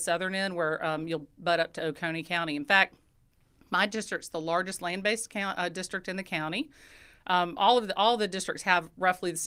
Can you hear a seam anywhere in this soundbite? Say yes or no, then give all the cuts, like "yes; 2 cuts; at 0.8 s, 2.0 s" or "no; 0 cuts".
no; 0 cuts